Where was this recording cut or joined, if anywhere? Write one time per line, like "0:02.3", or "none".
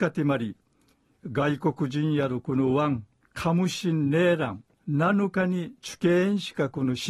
0:03.2
0:04.7